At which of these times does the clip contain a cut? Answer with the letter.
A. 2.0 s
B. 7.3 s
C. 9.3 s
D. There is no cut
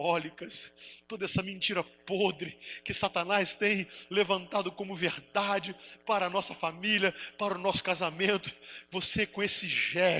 D